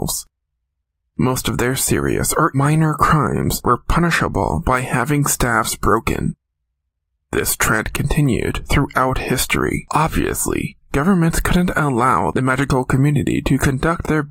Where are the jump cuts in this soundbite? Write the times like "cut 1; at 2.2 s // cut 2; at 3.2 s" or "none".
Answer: cut 1; at 2.5 s